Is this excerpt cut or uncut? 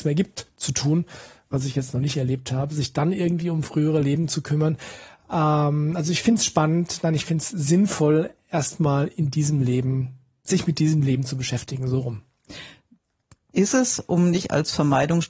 uncut